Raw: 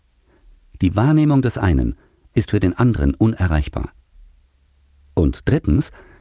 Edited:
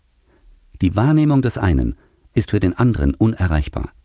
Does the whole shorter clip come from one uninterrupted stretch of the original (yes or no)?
yes